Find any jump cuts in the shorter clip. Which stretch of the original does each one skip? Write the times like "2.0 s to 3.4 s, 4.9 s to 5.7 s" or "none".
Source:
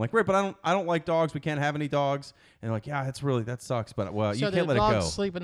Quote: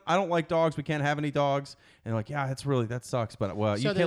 none